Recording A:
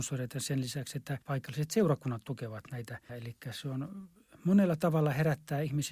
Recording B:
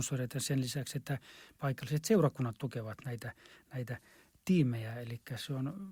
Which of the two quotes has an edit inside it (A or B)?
A